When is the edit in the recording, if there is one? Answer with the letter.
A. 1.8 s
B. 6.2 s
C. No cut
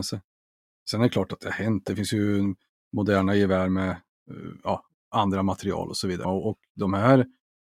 B